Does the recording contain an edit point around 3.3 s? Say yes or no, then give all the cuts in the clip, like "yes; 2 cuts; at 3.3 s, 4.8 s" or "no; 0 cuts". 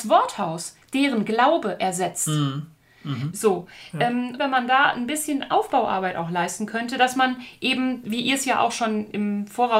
yes; 2 cuts; at 3.3 s, 4.4 s